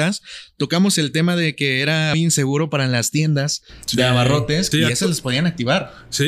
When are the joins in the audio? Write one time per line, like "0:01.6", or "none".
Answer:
0:02.1
0:04.7